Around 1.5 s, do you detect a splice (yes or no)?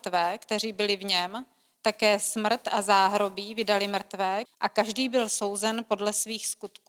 no